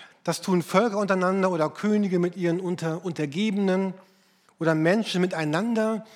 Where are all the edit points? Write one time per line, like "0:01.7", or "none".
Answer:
none